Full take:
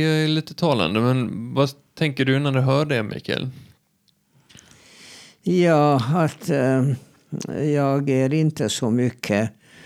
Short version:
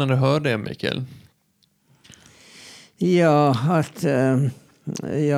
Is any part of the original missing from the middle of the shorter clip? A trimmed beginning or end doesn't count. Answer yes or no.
no